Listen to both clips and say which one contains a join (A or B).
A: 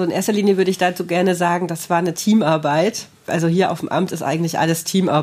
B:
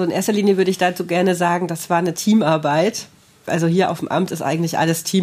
A